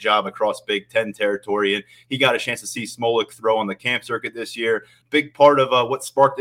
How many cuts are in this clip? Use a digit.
1